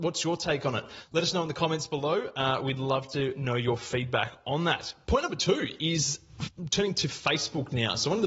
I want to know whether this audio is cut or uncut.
uncut